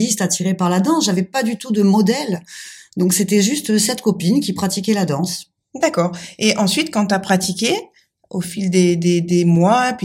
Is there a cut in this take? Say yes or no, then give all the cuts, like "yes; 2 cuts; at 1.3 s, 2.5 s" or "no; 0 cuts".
no; 0 cuts